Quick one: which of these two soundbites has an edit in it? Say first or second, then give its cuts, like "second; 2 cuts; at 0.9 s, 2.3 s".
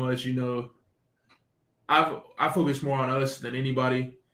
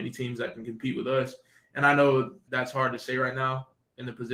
second; 1 cut; at 2.5 s